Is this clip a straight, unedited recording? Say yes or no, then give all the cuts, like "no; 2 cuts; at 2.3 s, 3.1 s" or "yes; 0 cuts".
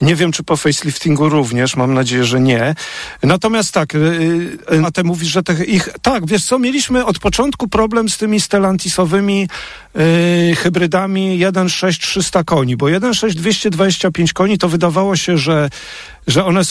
no; 1 cut; at 4.8 s